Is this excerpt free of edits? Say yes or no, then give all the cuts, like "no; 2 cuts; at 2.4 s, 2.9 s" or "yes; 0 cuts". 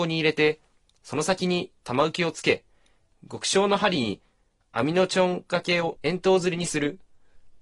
no; 1 cut; at 6.0 s